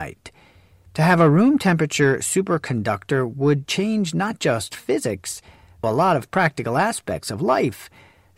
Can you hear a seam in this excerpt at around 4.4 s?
no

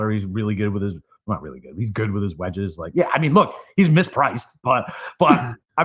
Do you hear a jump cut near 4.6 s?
yes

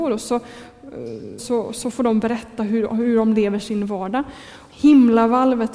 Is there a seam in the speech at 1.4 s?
yes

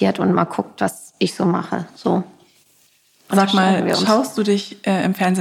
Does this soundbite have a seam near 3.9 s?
no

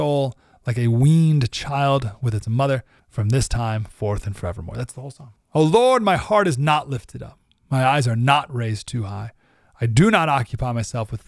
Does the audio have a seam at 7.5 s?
no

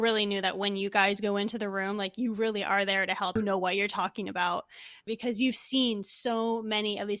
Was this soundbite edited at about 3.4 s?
yes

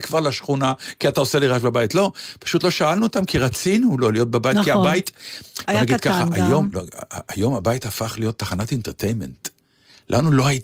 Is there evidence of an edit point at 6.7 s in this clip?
yes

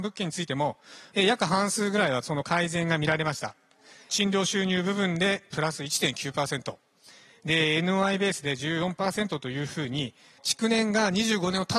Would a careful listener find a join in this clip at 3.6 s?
no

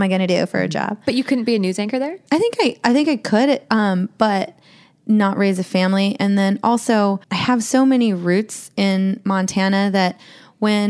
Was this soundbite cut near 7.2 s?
yes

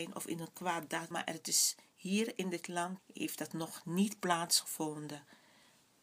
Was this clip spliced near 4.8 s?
no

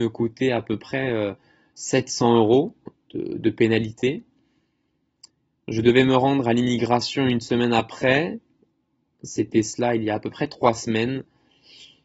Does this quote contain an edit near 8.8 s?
no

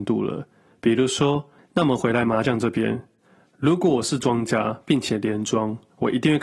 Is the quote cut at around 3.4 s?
no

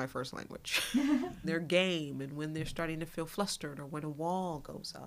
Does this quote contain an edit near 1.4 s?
yes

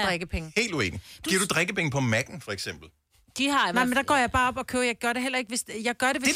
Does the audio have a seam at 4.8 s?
no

